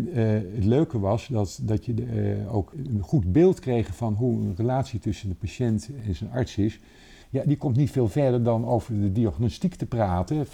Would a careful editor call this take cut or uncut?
cut